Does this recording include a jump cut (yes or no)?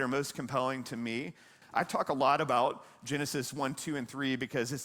yes